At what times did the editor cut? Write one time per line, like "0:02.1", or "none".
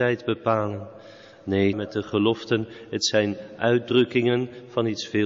0:01.7